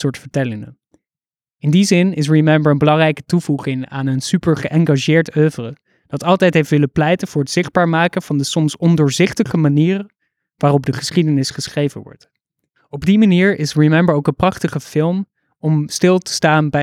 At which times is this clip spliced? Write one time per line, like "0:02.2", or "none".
none